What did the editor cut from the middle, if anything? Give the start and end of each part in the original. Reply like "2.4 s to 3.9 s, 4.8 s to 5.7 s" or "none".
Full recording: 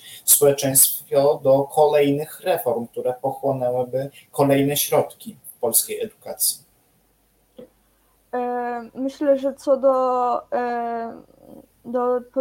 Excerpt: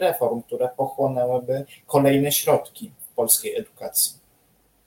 none